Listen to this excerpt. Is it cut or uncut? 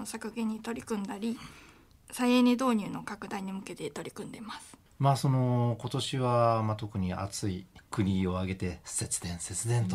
uncut